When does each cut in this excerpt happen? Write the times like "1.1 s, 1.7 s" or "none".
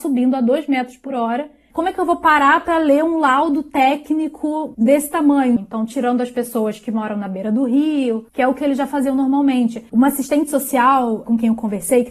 5.6 s, 9.9 s

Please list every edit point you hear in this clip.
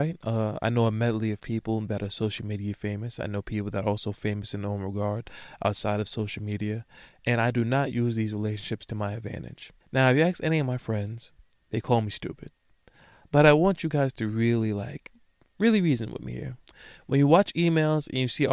9.8 s

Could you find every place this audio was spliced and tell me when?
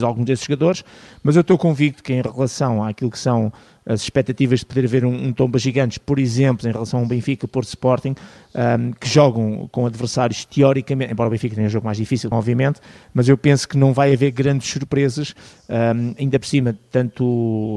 12.3 s

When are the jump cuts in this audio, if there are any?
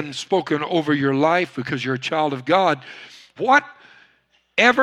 3.4 s

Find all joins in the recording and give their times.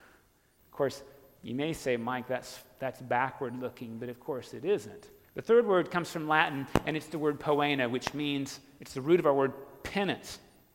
5.2 s

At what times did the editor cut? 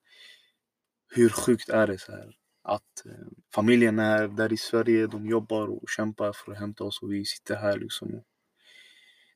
3.4 s

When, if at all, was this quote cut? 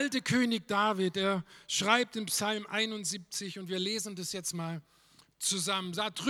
none

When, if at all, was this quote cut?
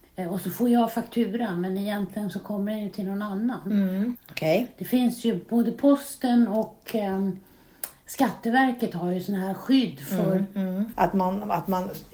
4.2 s, 10.9 s

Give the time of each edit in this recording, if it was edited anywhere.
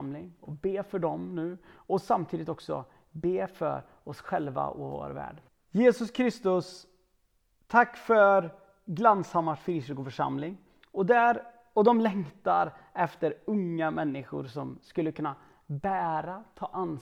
5.5 s, 10.8 s

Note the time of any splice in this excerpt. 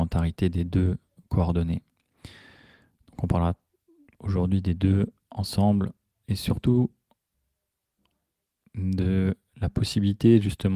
none

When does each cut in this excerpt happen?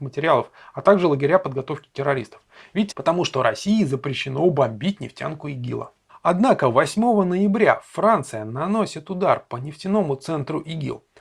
2.9 s

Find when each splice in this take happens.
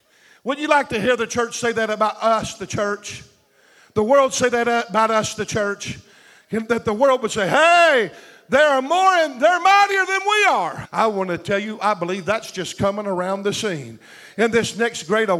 10.8 s

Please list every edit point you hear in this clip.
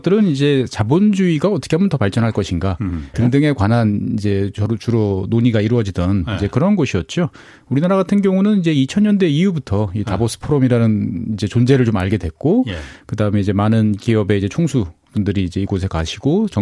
3.1 s

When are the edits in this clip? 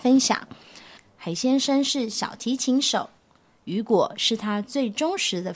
1.0 s

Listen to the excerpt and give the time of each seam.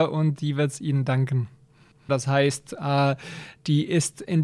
2.1 s

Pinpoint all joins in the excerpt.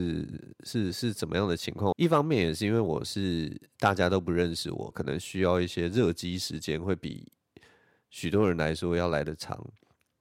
1.9 s, 4.9 s

